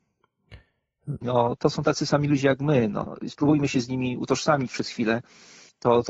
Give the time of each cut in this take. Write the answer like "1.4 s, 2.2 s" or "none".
1.2 s